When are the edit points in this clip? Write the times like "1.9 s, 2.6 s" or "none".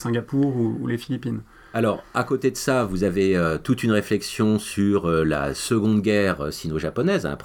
none